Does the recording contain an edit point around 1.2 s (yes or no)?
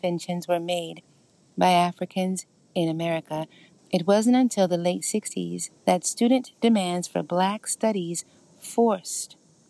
no